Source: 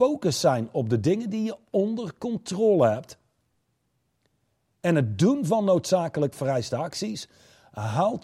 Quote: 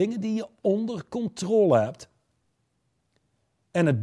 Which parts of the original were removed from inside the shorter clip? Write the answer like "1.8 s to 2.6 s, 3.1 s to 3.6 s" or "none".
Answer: none